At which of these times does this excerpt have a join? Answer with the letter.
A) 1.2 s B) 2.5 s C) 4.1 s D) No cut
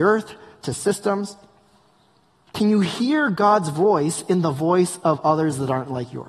B